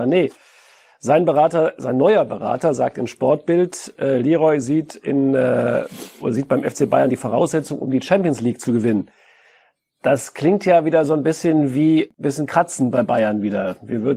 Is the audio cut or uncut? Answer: uncut